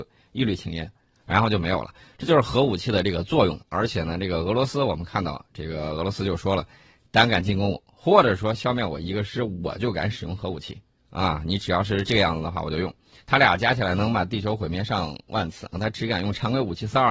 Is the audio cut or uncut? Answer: cut